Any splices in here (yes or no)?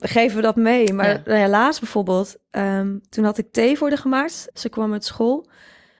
yes